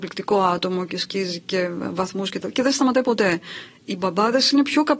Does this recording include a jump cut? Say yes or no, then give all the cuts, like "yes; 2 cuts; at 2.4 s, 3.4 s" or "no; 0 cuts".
no; 0 cuts